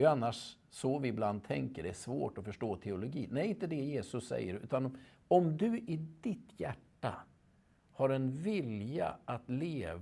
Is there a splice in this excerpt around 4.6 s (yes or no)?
no